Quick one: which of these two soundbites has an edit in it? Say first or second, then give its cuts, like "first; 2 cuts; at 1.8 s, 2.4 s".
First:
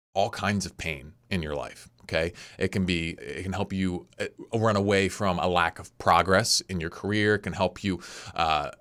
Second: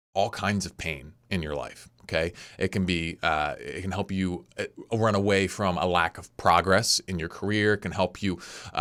first; 1 cut; at 3.2 s